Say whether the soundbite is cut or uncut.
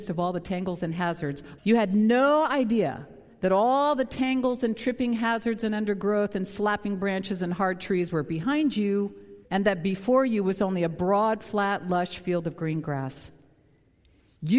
cut